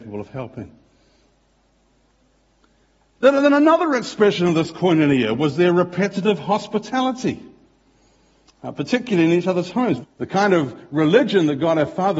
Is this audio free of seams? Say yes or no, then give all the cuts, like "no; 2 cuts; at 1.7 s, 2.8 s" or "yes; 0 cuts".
no; 1 cut; at 10.0 s